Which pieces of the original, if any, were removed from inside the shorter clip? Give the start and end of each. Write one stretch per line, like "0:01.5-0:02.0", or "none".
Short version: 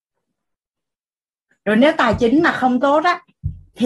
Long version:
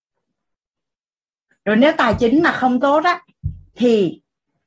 none